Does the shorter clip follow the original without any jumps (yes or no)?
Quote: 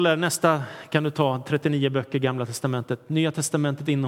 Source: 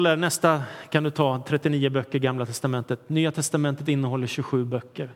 yes